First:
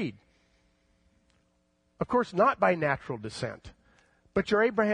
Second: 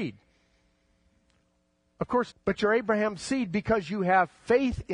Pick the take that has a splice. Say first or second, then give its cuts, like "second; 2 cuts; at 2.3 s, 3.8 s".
second; 1 cut; at 2.3 s